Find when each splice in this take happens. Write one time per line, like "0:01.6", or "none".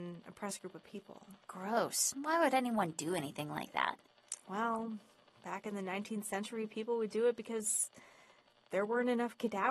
none